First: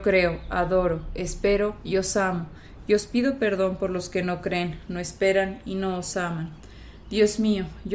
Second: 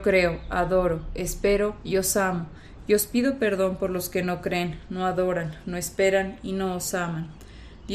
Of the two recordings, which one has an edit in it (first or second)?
first